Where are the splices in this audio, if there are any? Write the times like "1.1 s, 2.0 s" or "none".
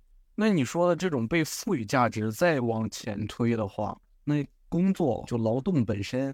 5.3 s

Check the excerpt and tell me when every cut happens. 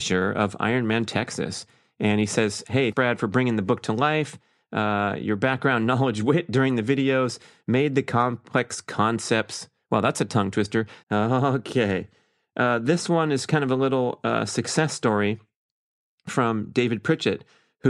2.9 s, 11.0 s

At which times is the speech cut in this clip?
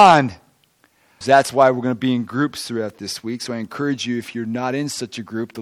1.2 s

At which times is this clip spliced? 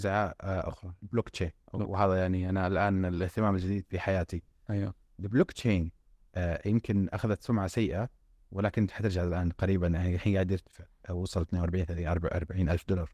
1.6 s

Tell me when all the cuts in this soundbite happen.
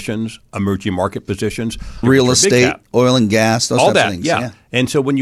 2.0 s

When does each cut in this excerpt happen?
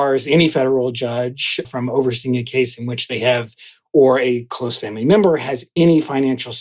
1.6 s

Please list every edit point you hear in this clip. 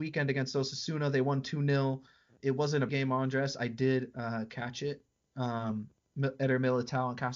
2.9 s

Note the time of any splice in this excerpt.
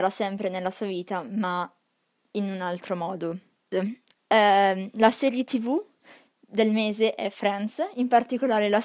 3.7 s

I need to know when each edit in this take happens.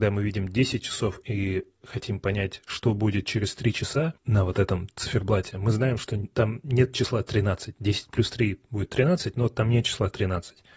none

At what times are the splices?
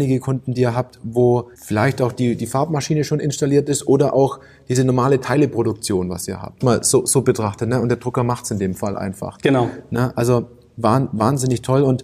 1.5 s, 6.6 s

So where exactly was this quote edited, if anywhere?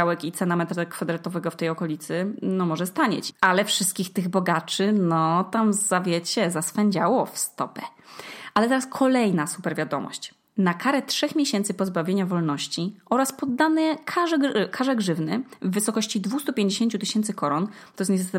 3.3 s

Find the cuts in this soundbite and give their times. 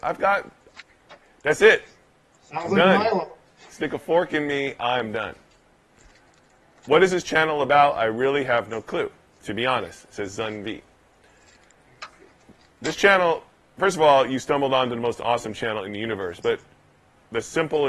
none

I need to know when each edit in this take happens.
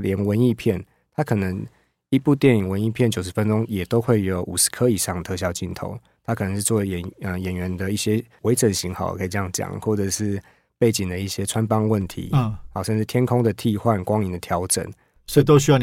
none

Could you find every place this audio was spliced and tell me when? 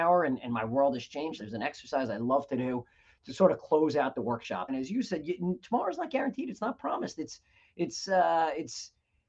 1.4 s, 4.7 s

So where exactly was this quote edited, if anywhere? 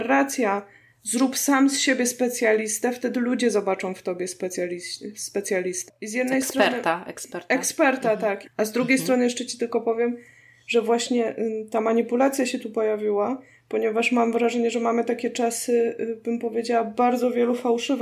5.9 s, 8.4 s

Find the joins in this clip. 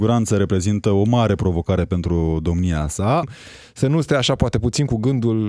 3.2 s

